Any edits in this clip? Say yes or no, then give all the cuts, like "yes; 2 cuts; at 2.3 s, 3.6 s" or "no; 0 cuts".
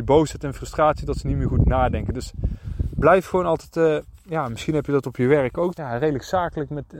yes; 1 cut; at 5.7 s